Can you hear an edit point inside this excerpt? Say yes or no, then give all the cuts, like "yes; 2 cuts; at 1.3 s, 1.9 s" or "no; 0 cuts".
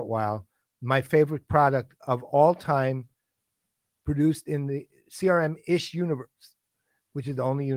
no; 0 cuts